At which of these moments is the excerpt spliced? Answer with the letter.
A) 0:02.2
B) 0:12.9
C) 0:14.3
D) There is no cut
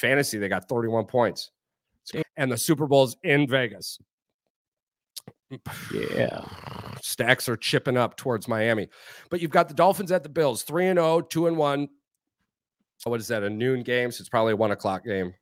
A